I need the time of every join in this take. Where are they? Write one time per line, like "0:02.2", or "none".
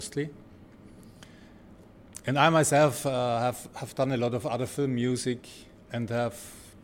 none